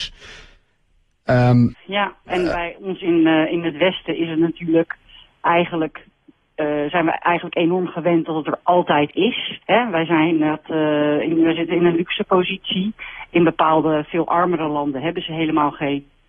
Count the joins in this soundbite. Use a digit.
2